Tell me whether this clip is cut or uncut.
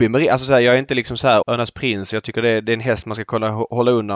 cut